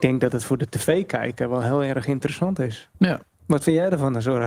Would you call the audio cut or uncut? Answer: cut